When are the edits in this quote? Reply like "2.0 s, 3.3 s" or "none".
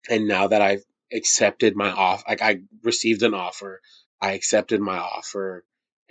none